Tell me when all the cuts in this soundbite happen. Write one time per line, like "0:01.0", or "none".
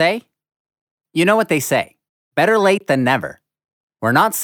none